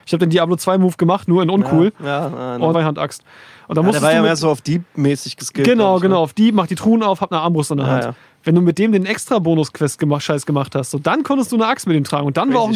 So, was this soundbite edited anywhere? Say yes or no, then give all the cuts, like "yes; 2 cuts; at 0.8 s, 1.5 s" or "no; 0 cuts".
yes; 1 cut; at 2.7 s